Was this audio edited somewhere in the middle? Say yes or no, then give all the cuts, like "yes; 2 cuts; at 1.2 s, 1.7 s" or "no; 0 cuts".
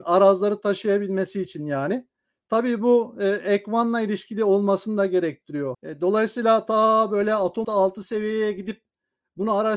yes; 2 cuts; at 5.7 s, 7.6 s